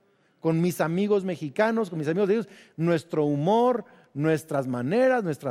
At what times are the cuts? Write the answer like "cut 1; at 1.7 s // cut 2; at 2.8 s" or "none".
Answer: none